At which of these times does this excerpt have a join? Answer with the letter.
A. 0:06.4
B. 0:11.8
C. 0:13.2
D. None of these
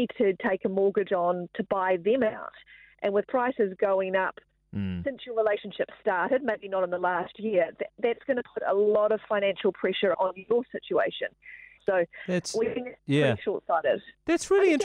B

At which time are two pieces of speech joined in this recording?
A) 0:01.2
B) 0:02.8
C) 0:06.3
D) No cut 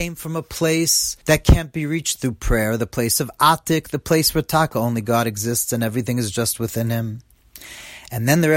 A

